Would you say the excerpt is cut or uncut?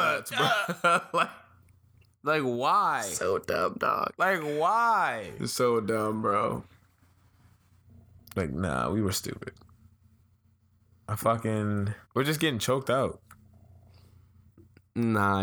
cut